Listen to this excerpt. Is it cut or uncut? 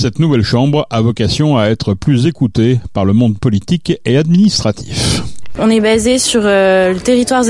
cut